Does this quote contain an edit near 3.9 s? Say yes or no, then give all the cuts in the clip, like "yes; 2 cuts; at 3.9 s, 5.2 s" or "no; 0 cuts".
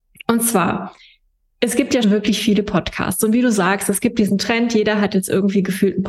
no; 1 cut; at 2.0 s